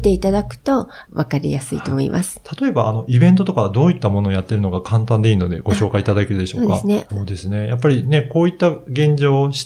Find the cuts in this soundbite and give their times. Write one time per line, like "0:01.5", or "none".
0:07.1